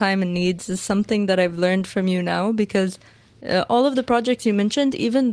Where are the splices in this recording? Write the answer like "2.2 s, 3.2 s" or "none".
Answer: none